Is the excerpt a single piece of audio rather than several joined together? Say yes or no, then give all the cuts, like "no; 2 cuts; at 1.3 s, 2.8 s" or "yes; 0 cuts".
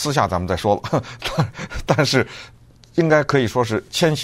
yes; 0 cuts